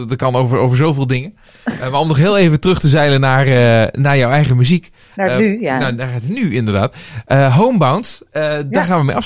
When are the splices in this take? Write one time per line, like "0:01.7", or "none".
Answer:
none